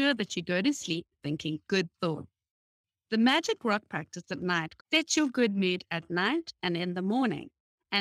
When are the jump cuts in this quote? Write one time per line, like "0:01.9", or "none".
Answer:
0:04.8

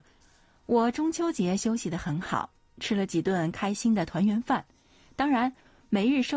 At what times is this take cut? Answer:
none

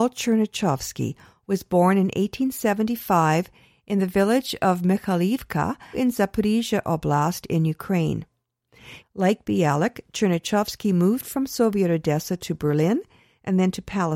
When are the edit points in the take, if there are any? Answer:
0:05.9
0:09.0

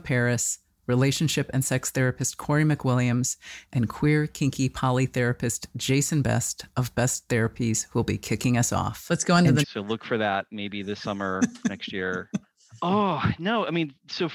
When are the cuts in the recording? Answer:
0:09.6

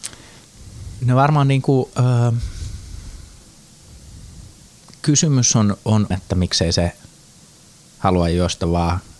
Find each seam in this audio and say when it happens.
0:06.1

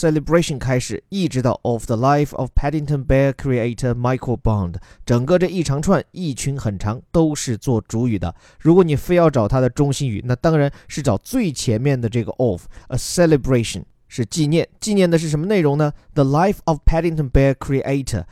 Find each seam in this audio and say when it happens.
none

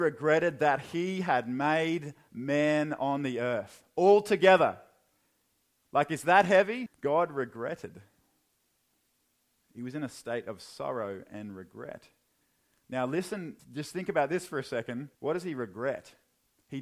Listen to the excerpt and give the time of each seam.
0:06.9
0:13.6
0:15.1

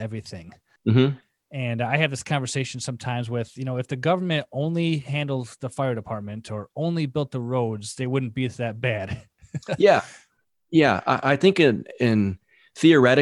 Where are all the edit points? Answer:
none

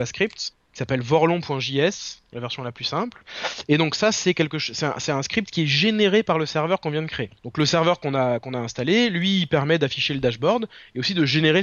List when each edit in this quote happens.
0:07.4

